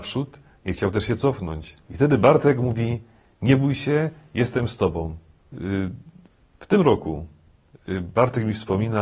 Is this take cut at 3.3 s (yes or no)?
no